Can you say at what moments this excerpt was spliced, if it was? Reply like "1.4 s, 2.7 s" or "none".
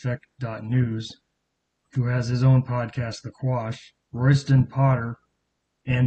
1.8 s, 4.0 s